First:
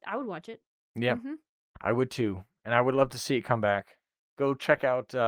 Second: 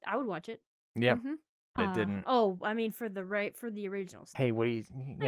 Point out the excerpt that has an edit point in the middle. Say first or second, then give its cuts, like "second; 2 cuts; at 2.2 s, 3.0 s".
second; 2 cuts; at 1.8 s, 4.3 s